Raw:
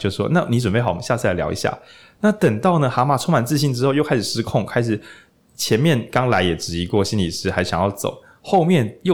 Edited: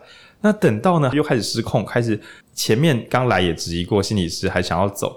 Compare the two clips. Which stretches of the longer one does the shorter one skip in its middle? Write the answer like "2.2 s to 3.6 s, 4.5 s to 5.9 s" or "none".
2.9 s to 3.9 s, 5.2 s to 5.4 s